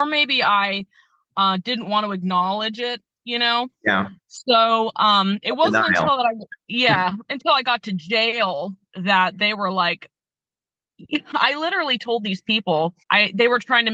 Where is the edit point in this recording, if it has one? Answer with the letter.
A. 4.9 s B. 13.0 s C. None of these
B